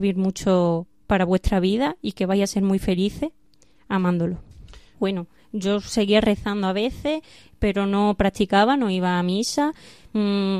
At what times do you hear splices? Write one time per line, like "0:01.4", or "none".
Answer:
0:04.9